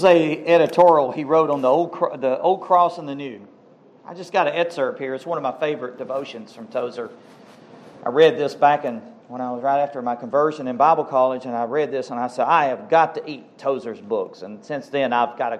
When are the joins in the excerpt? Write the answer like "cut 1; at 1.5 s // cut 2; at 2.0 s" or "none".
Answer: none